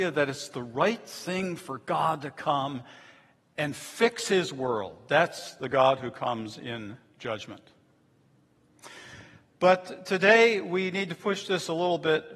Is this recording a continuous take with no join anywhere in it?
yes; 0 cuts

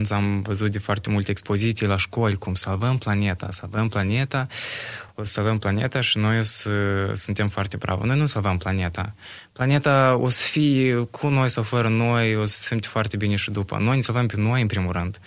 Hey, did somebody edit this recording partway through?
no; 0 cuts

